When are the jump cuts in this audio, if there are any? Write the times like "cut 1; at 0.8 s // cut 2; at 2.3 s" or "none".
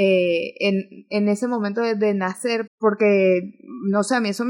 cut 1; at 2.7 s